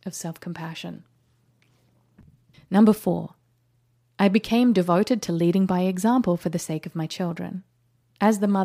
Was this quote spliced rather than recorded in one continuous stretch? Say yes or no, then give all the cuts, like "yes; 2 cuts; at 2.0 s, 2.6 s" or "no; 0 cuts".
yes; 1 cut; at 2.5 s